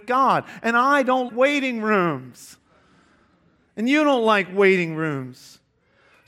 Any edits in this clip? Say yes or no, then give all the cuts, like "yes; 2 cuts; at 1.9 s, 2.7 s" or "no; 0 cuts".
yes; 1 cut; at 1.3 s